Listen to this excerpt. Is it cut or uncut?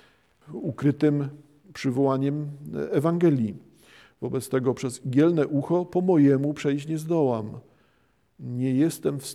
uncut